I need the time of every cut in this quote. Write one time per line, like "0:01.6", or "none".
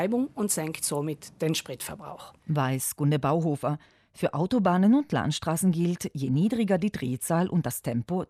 0:02.4

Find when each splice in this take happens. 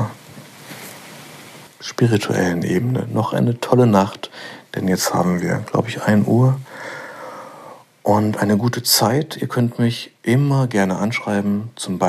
0:01.7

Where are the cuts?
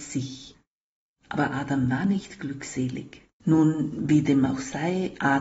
0:03.4

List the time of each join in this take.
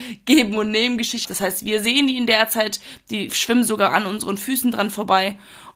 0:01.2

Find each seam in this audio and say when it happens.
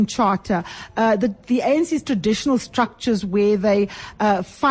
none

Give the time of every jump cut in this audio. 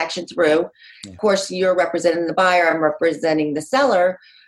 none

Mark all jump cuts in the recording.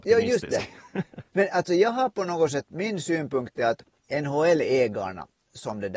none

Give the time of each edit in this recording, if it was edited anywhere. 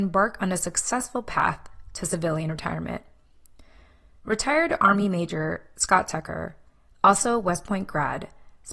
none

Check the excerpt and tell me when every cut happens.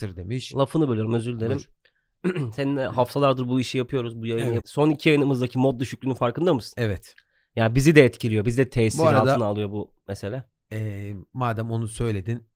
0:04.6

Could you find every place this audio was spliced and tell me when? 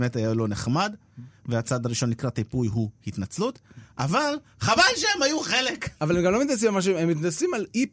none

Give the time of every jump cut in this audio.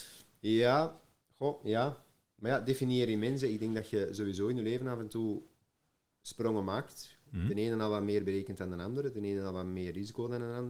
none

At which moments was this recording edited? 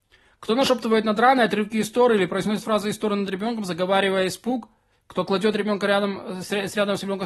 none

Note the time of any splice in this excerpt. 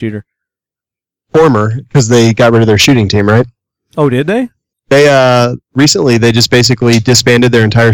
0:04.7

